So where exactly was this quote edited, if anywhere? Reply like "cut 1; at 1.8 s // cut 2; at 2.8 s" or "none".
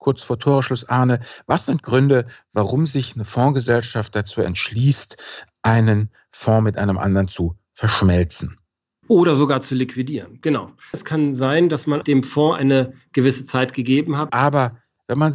cut 1; at 10.9 s // cut 2; at 12.0 s // cut 3; at 14.3 s